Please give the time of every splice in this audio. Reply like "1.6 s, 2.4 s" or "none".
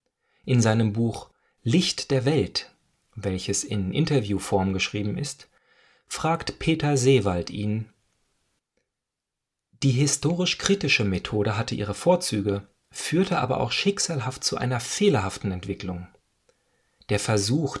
none